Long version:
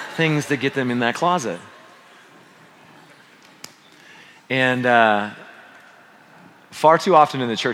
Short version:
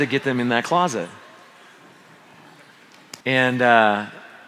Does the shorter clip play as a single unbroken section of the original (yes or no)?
no